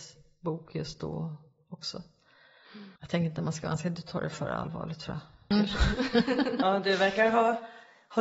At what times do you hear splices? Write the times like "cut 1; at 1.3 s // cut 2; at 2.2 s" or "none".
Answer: cut 1; at 3.0 s // cut 2; at 5.5 s